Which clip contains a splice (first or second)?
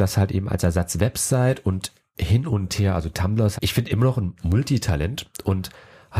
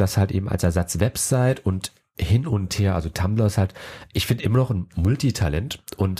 first